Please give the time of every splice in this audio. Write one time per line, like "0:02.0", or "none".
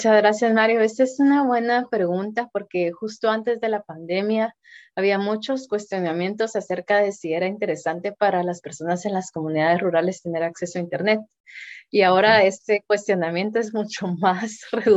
none

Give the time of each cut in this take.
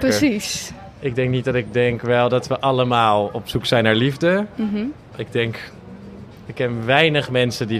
none

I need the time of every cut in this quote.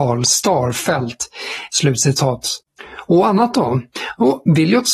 0:01.7
0:03.1

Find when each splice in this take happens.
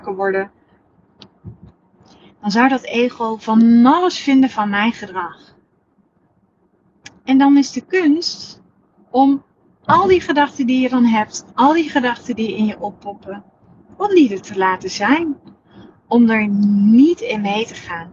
none

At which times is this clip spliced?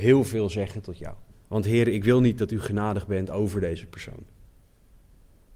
0:01.4

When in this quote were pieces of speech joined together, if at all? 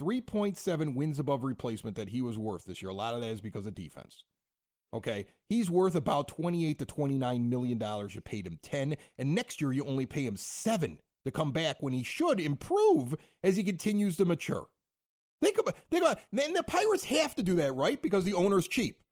none

